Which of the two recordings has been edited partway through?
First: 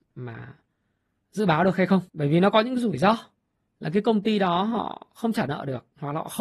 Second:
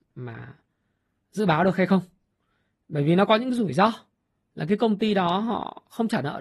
first; 1 cut; at 2.1 s

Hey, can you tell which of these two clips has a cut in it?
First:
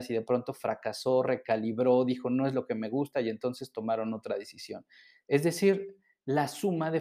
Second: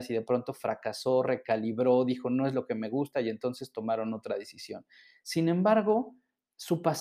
first; 1 cut; at 5.2 s

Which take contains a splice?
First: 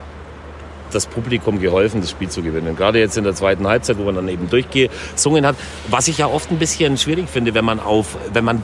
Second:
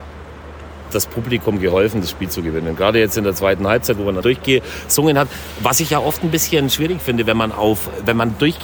second; 1 cut; at 4.2 s

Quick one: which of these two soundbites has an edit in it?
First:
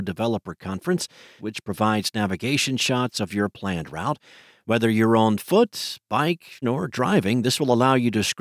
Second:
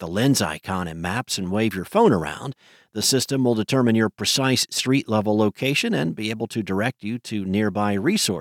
first; 2 cuts; at 1.4 s, 6.6 s

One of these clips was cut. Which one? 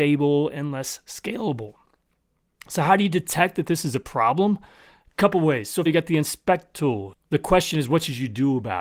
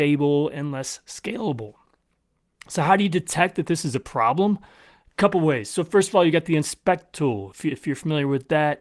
first; 2 cuts; at 5.9 s, 7.1 s

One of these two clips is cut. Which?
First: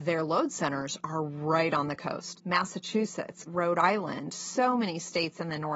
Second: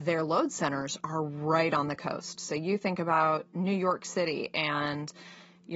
first; 2 cuts; at 2.3 s, 3.4 s

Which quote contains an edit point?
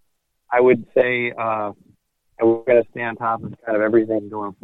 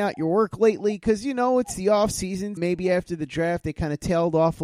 second; 1 cut; at 2.6 s

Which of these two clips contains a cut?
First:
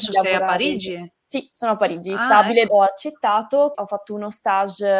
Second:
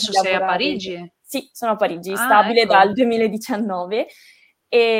first; 2 cuts; at 2.7 s, 3.7 s

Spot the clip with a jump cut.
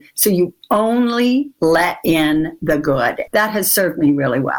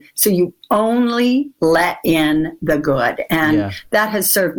first; 1 cut; at 3.3 s

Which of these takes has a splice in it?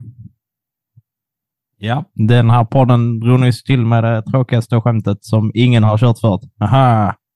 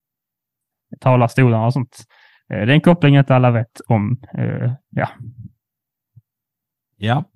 second; 1 cut; at 4.8 s

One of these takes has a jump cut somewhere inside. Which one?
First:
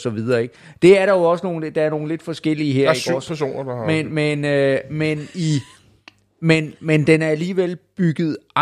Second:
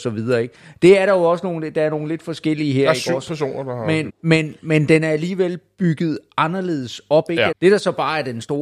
second; 2 cuts; at 4.1 s, 7.5 s

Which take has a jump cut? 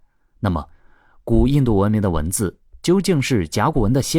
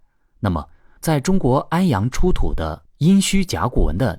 second; 1 cut; at 1.0 s

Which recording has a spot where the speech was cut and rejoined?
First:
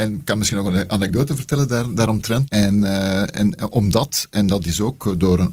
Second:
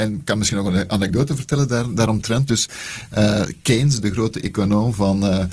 first; 1 cut; at 2.5 s

